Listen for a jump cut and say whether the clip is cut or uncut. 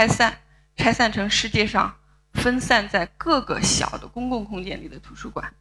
uncut